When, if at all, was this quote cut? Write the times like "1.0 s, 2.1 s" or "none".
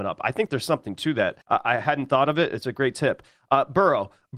1.4 s